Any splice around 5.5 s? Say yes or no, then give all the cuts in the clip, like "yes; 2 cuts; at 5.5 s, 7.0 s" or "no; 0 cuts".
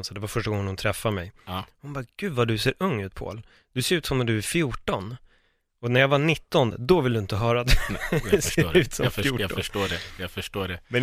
no; 0 cuts